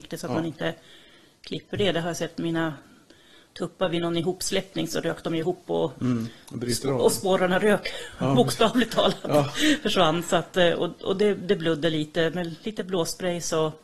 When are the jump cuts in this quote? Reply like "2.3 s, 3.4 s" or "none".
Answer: none